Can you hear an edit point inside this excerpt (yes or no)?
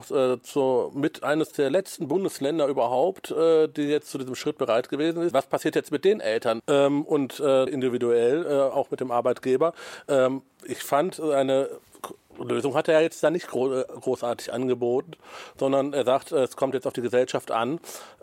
yes